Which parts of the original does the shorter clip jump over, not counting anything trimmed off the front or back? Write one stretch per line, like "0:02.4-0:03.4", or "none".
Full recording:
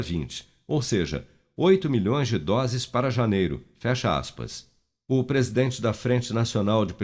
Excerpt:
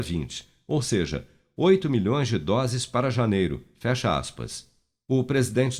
none